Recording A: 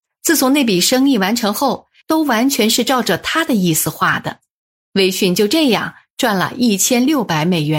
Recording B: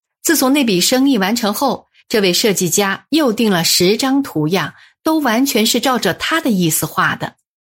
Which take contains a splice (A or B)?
A